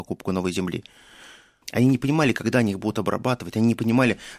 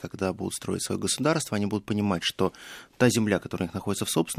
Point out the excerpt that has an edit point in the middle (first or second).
first